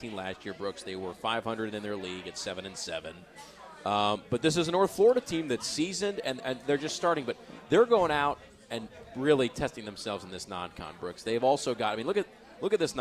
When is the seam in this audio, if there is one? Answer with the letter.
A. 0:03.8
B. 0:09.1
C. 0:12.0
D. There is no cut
D